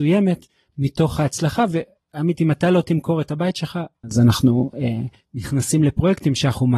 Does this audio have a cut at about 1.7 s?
no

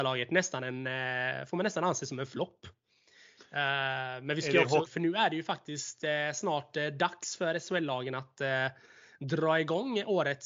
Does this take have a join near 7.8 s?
no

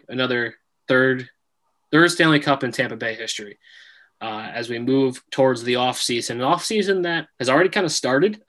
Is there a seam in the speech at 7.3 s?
yes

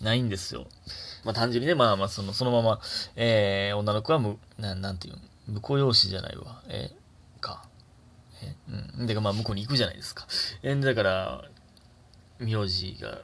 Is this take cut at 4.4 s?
yes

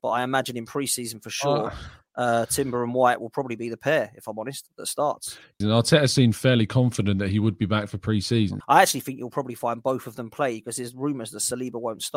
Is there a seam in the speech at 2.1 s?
no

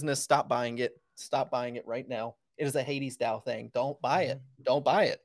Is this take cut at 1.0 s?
no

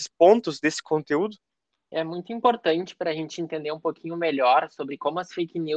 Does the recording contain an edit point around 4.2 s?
no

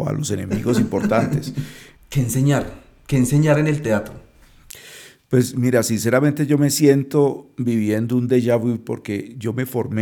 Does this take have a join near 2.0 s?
yes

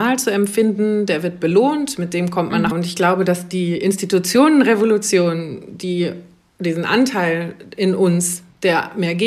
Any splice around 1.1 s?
no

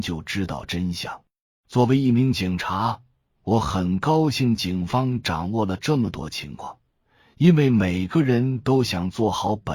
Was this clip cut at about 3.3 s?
no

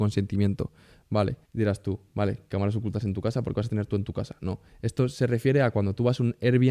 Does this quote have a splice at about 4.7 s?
no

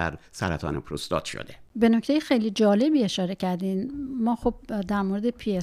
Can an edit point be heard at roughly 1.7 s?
yes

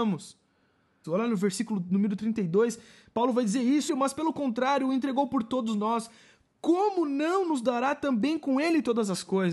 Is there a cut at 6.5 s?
no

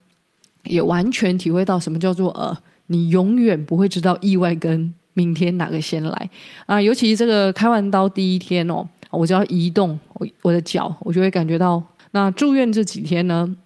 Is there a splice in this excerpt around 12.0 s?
yes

